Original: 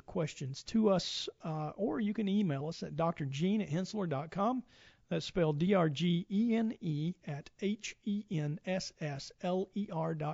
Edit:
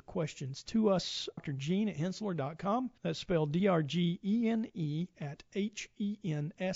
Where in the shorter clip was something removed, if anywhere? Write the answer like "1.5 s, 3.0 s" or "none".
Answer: 1.4 s, 3.0 s